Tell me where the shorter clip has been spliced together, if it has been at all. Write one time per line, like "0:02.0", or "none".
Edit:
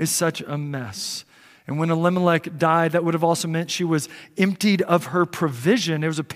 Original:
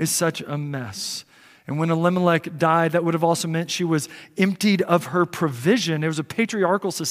none